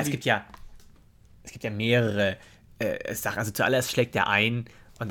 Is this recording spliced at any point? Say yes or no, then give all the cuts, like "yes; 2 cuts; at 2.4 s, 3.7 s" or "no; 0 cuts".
no; 0 cuts